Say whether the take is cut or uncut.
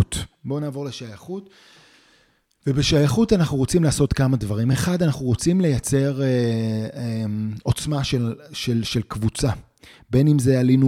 uncut